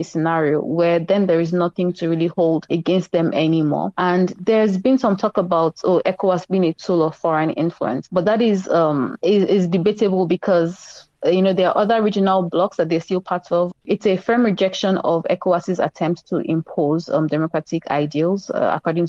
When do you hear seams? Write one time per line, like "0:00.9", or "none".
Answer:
0:13.7